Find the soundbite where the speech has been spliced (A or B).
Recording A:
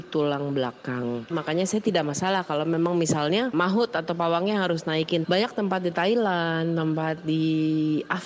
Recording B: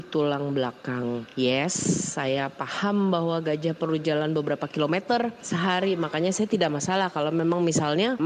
A